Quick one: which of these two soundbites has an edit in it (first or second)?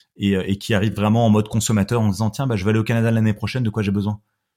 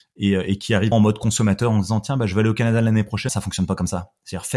second